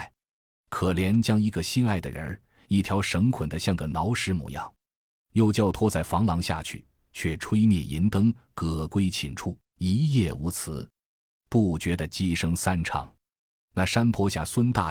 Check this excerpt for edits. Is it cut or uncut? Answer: cut